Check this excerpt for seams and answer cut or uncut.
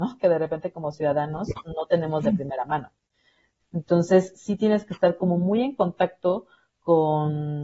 cut